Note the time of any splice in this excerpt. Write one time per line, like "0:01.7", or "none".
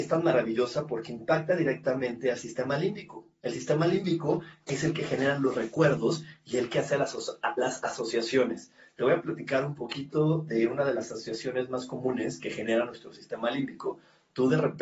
none